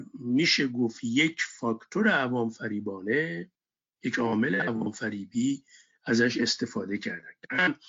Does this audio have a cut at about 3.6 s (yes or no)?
no